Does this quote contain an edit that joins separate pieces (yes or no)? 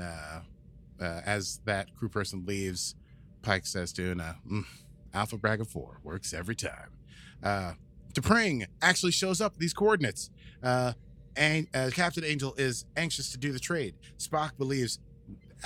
no